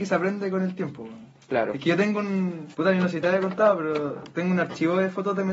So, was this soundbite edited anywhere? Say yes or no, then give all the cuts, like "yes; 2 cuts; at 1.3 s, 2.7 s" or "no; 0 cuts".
yes; 1 cut; at 2.7 s